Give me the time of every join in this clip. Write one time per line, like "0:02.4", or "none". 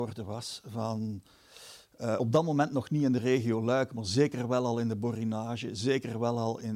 none